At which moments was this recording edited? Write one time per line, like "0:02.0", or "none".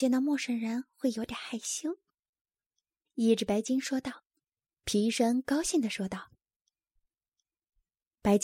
0:04.5